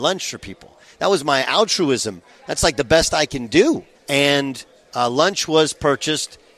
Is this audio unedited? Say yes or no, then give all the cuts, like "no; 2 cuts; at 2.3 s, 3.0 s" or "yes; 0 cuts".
no; 1 cut; at 3.9 s